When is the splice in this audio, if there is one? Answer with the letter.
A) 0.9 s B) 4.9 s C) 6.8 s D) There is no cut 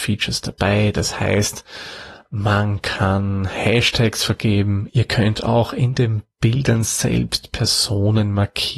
B